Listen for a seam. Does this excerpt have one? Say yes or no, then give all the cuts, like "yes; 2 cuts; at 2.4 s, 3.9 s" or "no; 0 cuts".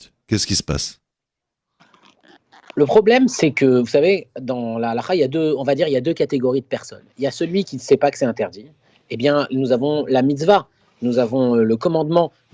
no; 0 cuts